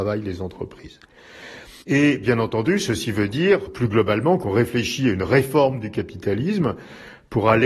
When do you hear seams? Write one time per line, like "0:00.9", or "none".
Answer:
0:01.8
0:03.7